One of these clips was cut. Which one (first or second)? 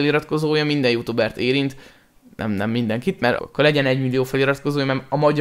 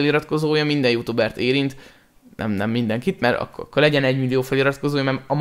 first